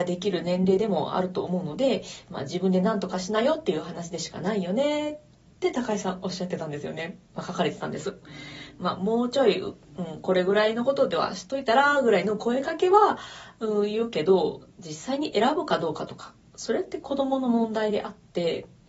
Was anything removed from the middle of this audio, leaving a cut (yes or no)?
no